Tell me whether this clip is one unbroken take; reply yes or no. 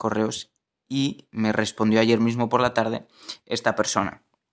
yes